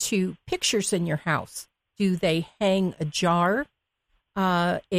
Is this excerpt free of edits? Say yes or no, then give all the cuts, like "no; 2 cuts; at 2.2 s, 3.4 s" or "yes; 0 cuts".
no; 1 cut; at 1.8 s